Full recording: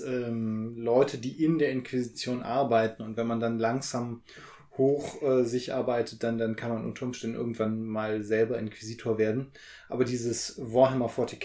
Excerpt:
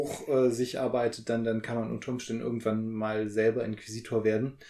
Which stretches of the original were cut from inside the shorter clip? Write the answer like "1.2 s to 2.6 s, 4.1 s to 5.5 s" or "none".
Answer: none